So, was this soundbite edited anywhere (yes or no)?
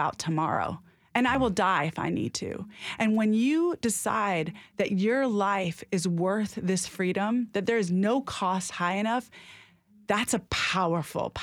no